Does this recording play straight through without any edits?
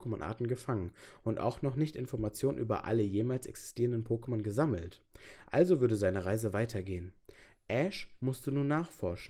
yes; 0 cuts

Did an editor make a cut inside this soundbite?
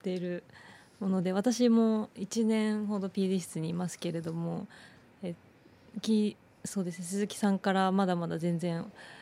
no; 0 cuts

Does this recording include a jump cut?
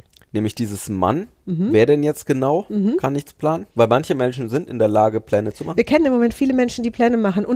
yes; 1 cut; at 3.7 s

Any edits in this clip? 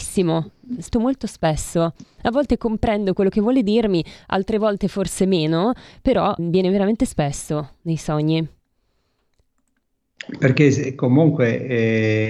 yes; 2 cuts; at 0.9 s, 6.4 s

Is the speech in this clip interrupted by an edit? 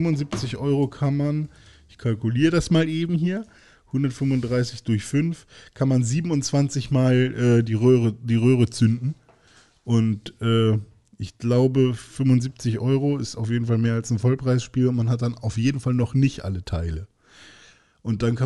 no; 0 cuts

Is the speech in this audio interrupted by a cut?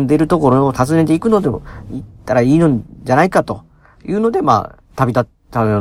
no; 0 cuts

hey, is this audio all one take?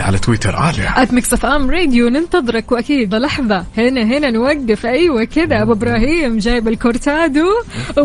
no; 1 cut; at 3.1 s

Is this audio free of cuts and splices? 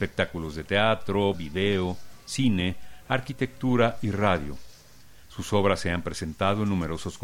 no; 1 cut; at 1.3 s

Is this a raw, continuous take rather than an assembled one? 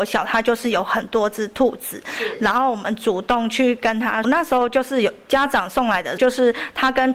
no; 2 cuts; at 4.2 s, 6.2 s

